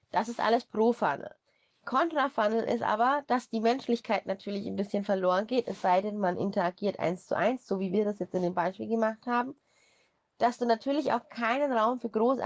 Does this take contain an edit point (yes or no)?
no